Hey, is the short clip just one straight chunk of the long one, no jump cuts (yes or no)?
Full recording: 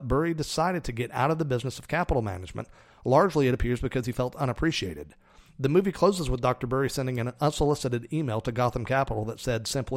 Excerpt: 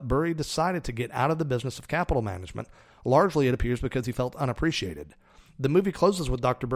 yes